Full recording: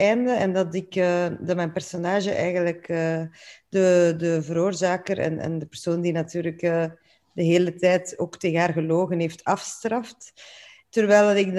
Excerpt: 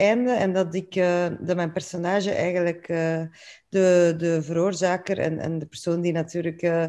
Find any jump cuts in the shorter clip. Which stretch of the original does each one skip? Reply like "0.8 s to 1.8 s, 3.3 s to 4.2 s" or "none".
none